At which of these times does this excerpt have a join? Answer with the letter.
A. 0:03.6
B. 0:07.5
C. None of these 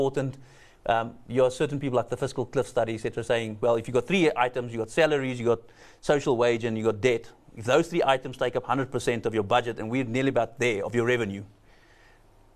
C